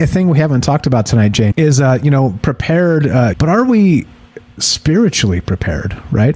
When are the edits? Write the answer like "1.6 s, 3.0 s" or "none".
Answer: 1.5 s, 3.3 s